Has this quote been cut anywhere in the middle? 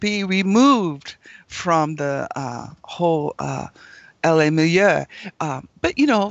no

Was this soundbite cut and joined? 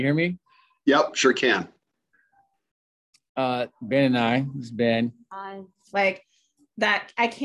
yes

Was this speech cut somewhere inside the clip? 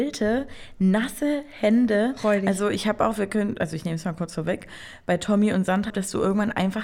yes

